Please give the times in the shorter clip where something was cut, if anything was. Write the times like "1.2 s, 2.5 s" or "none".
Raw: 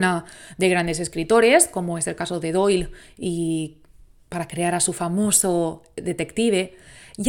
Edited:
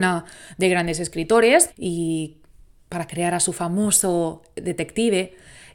1.7 s